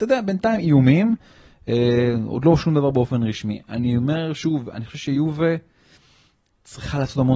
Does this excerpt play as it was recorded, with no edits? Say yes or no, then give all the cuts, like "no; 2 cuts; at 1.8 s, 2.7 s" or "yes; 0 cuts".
yes; 0 cuts